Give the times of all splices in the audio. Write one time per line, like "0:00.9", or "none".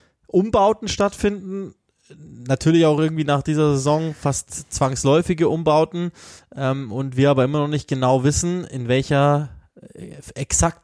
none